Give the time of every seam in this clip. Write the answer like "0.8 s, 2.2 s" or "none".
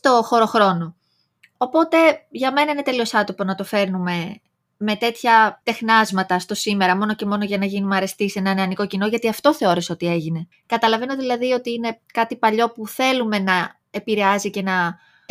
10.5 s, 12.0 s